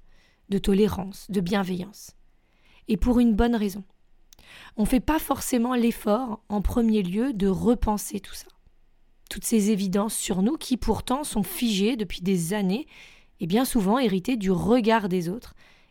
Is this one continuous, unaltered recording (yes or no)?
yes